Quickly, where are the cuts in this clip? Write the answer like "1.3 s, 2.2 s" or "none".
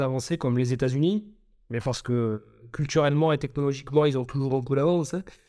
none